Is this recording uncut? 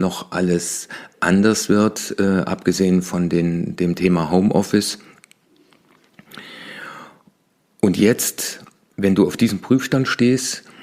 yes; 0 cuts

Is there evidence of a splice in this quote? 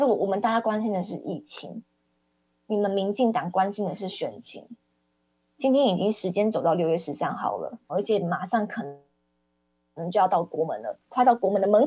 yes; 1 cut; at 7.9 s

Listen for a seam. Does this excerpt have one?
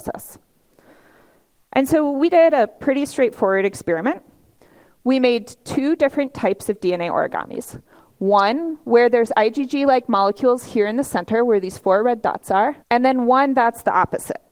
yes; 1 cut; at 12.8 s

